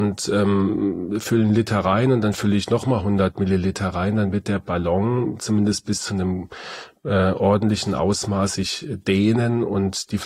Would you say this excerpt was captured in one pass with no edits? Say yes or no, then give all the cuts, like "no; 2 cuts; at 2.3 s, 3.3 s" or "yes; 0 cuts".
yes; 0 cuts